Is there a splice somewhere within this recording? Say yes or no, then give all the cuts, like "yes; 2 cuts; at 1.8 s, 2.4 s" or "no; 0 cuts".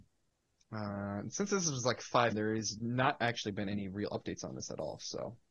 yes; 1 cut; at 2.3 s